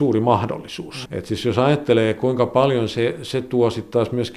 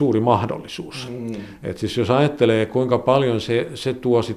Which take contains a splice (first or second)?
first